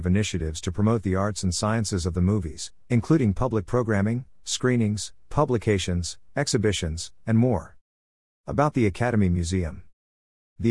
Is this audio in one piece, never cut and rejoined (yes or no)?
no